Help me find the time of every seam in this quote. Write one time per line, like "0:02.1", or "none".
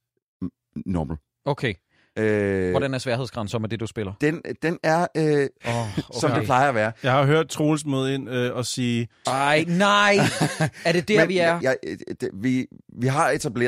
0:05.6
0:09.2
0:11.6